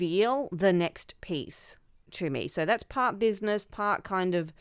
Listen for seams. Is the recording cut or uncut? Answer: uncut